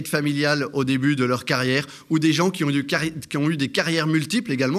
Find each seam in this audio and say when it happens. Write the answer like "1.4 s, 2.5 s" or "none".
none